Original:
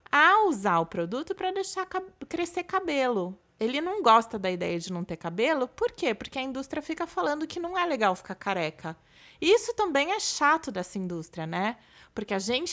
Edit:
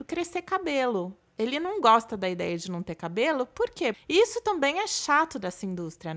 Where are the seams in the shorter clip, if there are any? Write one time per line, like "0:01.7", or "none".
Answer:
0:03.9

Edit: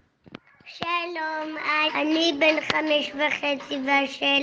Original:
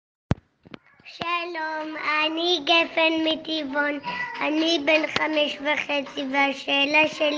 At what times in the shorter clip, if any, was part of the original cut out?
0:01.9

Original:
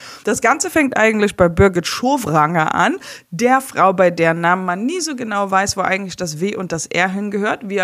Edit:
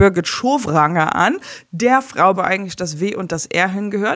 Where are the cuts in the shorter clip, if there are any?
0:02.3

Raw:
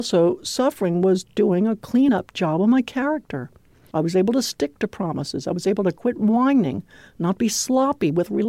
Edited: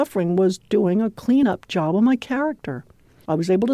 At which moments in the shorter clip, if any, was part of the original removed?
none

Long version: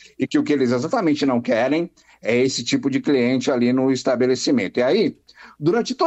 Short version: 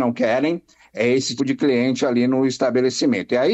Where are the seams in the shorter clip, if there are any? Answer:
0:01.4

